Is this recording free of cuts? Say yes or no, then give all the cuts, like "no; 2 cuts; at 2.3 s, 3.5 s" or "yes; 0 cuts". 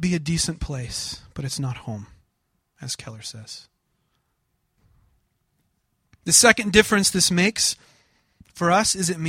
yes; 0 cuts